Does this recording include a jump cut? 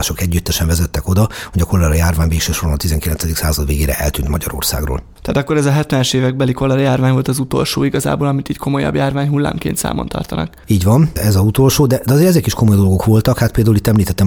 no; 0 cuts

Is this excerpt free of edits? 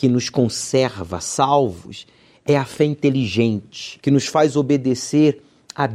no; 1 cut; at 4.0 s

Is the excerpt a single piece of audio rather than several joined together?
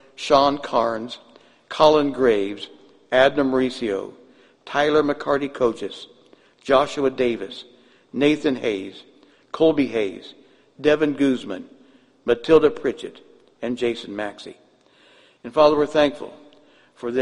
yes; 0 cuts

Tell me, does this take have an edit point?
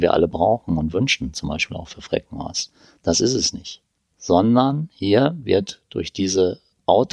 no; 0 cuts

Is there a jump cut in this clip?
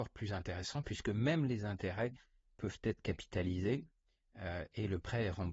no; 0 cuts

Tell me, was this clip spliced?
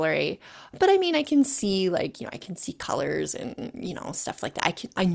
no; 0 cuts

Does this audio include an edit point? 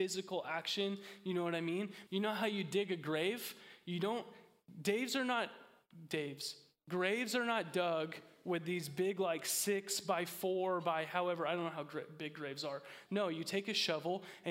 yes; 2 cuts; at 2.1 s, 13.1 s

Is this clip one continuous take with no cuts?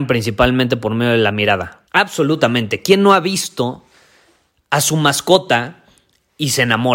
no; 1 cut; at 1.9 s

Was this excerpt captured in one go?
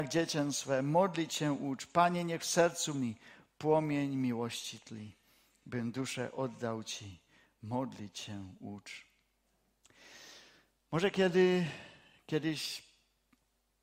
yes; 0 cuts

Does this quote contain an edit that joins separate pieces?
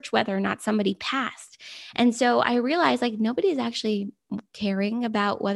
no; 0 cuts

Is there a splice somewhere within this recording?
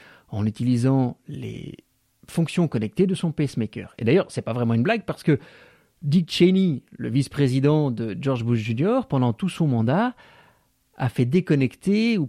no; 0 cuts

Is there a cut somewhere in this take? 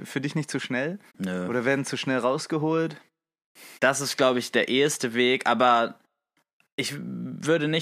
yes; 2 cuts; at 1.1 s, 3.8 s

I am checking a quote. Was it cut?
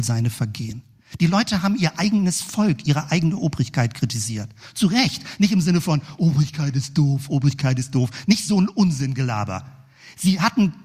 no; 0 cuts

